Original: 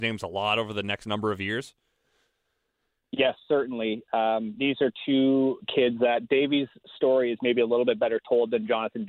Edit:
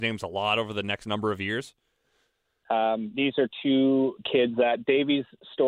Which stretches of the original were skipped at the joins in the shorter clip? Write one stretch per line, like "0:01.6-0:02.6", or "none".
0:02.6-0:04.1

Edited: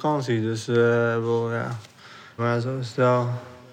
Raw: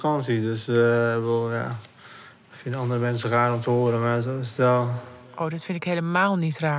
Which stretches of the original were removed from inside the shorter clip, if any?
0:02.4-0:04.0

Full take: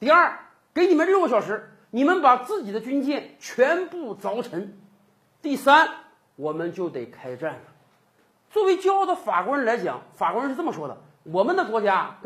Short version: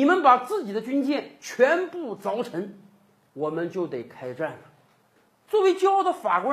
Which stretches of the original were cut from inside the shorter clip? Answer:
0:05.3-0:06.3

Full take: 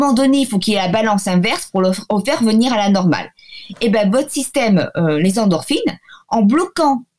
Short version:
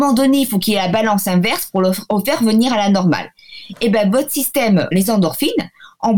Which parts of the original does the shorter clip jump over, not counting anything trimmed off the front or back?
0:04.9-0:05.2

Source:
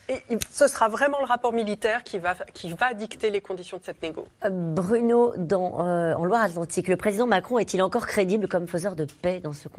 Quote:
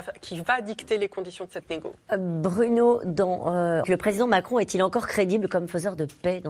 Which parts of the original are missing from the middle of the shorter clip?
0:06.2-0:06.8

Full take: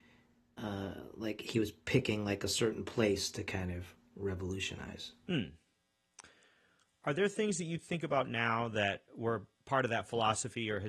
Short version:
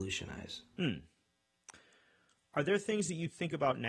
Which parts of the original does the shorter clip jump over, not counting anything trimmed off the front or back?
none

